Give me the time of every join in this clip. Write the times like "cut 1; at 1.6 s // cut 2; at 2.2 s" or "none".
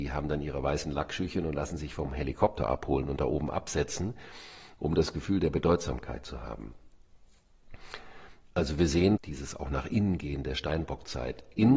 cut 1; at 9.2 s